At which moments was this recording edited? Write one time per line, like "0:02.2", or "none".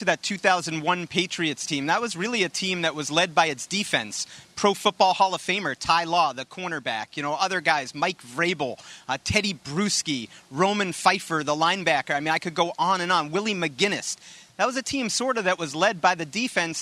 none